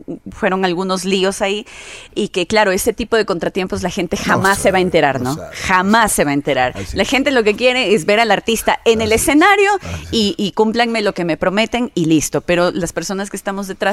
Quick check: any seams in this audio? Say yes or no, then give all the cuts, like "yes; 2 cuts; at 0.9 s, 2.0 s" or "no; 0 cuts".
no; 0 cuts